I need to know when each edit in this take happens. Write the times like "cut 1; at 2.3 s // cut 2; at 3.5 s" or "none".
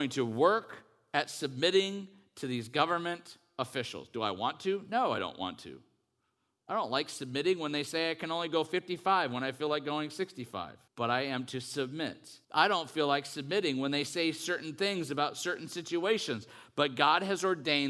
cut 1; at 10.9 s // cut 2; at 12.4 s